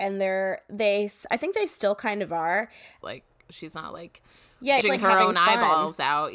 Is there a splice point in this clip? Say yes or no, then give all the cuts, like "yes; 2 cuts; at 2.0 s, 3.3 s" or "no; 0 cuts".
yes; 2 cuts; at 3.0 s, 4.8 s